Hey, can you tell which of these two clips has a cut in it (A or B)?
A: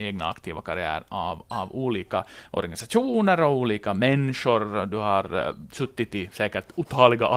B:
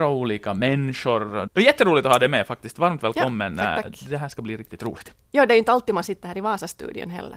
B